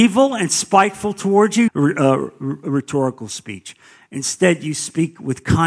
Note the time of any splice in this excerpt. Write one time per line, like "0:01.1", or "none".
0:01.7